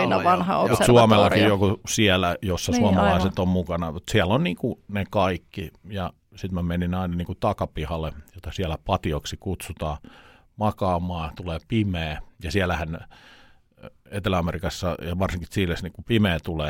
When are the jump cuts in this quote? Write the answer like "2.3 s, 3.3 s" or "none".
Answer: none